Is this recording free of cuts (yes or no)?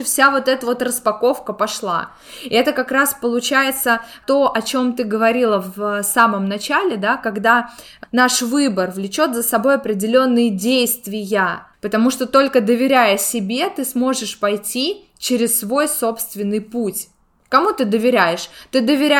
no